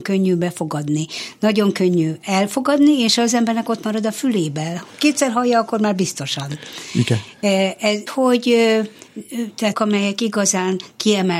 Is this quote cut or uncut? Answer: cut